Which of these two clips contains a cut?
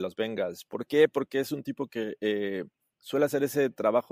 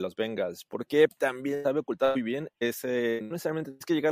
second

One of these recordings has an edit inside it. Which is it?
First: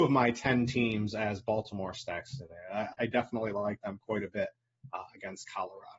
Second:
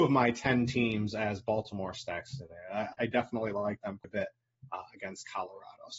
second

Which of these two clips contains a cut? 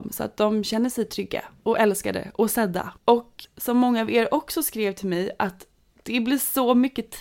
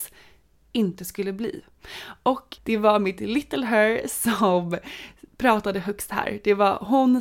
first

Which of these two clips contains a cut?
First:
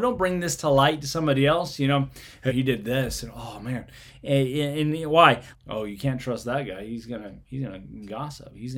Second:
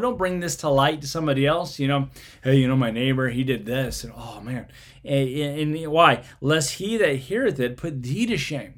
first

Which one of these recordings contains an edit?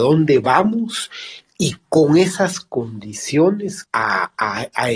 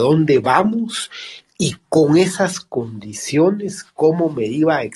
first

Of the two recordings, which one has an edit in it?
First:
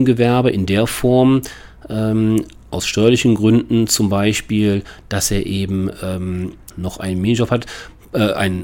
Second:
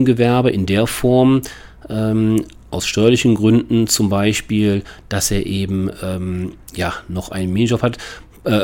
first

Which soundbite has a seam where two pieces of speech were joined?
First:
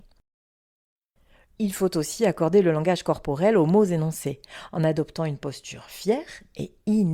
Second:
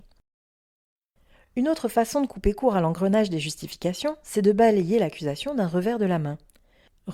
first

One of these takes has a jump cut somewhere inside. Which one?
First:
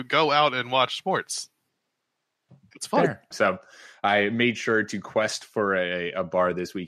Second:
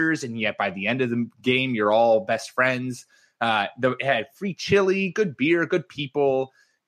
first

